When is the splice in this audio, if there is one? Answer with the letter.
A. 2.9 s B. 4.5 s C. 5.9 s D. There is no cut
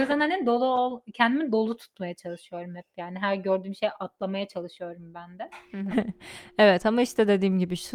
C